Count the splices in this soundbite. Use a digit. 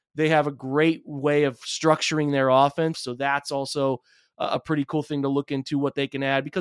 1